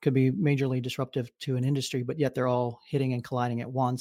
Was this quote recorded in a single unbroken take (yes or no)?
yes